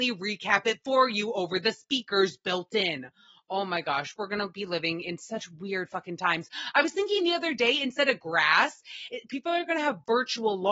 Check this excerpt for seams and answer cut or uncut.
uncut